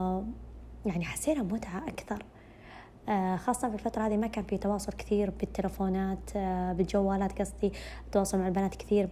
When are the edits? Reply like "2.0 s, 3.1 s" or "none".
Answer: none